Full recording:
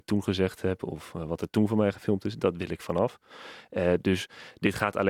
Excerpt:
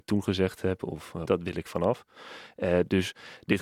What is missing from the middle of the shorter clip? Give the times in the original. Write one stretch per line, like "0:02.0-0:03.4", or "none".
0:01.3-0:02.4